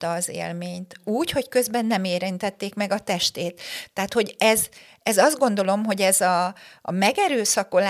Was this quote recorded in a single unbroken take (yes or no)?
yes